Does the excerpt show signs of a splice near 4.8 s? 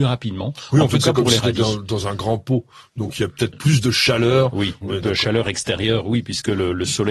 yes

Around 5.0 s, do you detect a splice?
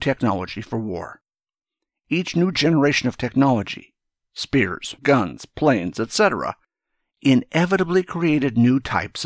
yes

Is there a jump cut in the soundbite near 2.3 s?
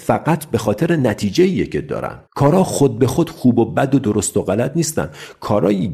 yes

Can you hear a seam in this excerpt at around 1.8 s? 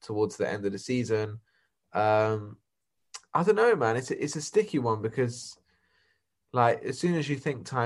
no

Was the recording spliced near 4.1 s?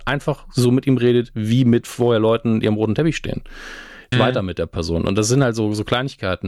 yes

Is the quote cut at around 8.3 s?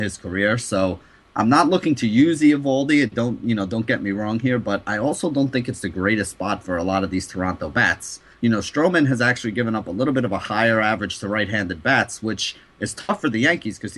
yes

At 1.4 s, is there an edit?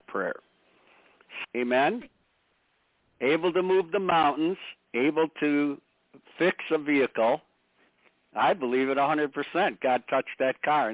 yes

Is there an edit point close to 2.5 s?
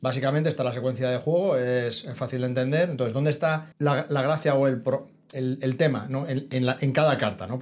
no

